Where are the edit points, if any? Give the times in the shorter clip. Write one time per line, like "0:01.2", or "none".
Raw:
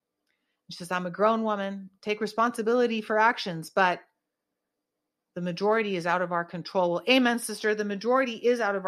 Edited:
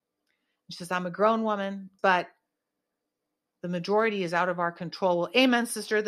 0:02.0